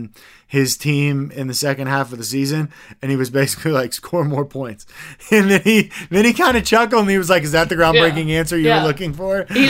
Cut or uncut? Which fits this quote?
uncut